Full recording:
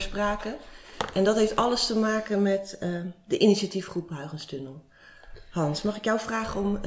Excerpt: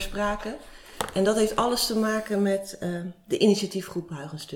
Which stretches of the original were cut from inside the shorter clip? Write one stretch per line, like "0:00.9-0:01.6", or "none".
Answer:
none

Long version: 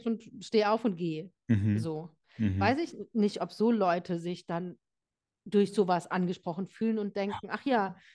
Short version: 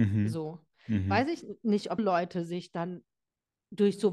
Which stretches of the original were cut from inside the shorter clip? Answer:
0:03.5-0:03.7

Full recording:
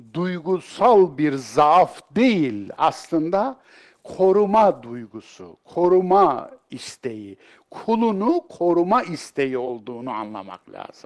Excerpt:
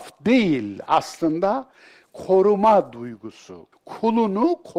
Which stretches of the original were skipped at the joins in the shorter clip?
0:05.6-0:07.6

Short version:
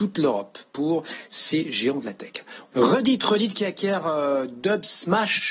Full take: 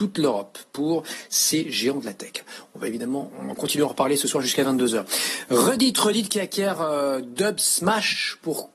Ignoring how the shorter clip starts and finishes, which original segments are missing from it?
0:02.7-0:05.5

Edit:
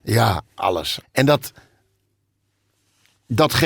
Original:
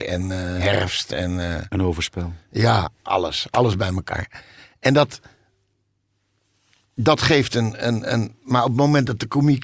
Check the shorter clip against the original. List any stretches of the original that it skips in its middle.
0:03.5-0:04.7

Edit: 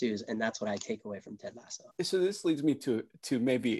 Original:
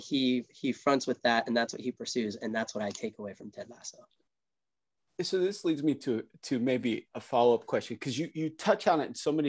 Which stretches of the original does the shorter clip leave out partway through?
0:04.0-0:05.1

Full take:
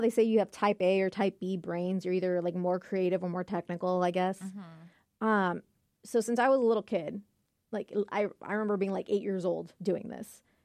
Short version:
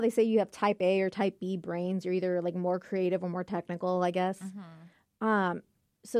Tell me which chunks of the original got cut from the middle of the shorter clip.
none

